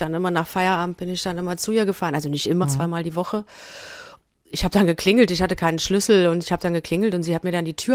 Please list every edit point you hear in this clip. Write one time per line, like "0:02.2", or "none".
0:02.6